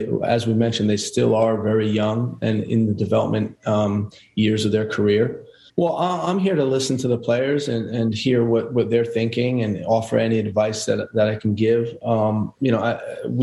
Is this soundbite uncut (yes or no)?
no